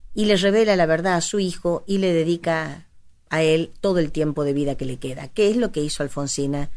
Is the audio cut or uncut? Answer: uncut